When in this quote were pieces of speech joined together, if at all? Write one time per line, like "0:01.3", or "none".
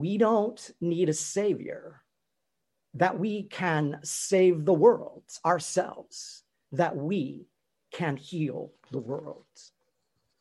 0:06.7